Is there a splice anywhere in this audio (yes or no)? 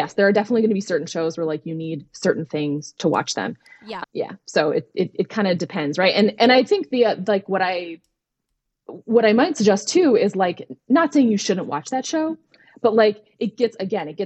yes